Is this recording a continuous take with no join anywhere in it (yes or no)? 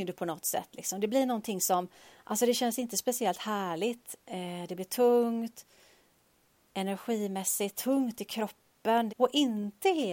no